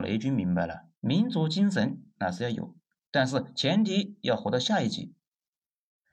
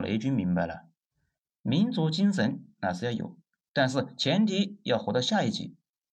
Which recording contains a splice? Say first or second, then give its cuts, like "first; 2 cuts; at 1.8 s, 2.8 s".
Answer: first; 1 cut; at 1.0 s